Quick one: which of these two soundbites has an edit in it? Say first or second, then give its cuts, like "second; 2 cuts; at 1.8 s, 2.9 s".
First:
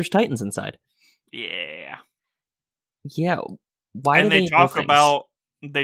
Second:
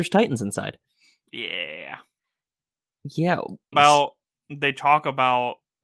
second; 1 cut; at 3.7 s